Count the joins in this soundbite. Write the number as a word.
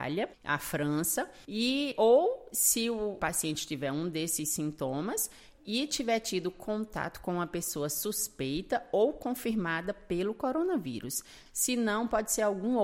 one